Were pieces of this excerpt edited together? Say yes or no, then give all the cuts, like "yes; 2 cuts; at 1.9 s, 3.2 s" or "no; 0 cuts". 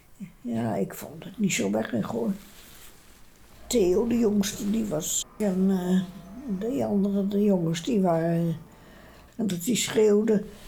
yes; 2 cuts; at 5.2 s, 9.3 s